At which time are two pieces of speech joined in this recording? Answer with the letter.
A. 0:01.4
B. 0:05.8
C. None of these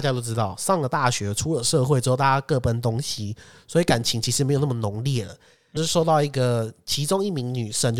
B